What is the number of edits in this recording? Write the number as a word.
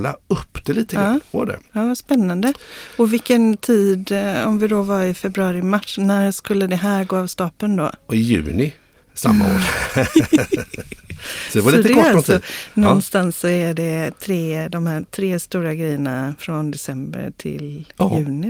one